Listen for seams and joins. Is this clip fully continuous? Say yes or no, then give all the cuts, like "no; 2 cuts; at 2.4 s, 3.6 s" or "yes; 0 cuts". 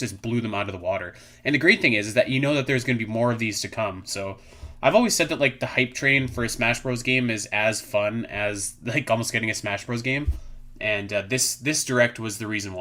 yes; 0 cuts